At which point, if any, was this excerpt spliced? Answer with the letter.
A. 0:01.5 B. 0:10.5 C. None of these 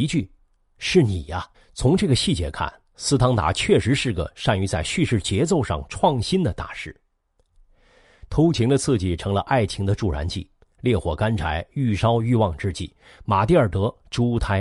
A